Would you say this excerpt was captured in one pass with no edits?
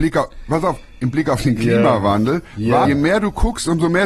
no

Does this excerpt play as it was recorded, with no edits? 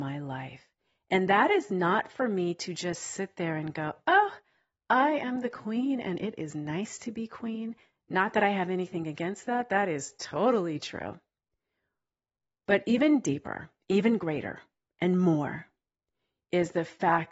yes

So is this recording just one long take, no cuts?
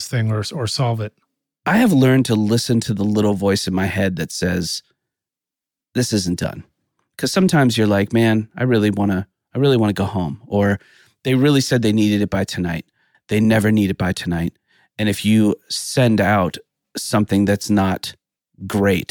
no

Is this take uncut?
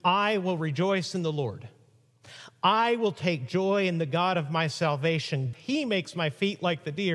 no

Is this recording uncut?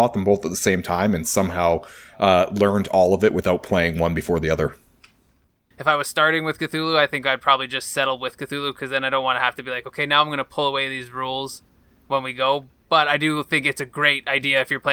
no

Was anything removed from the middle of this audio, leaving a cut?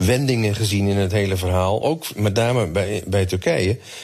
no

